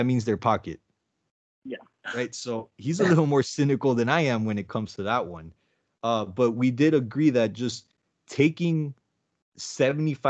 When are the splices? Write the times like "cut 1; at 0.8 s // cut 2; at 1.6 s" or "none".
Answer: none